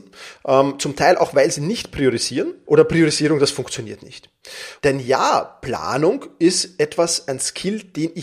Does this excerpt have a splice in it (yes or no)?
yes